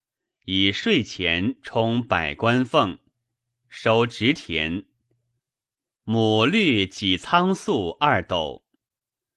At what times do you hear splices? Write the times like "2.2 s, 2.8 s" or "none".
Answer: 3.6 s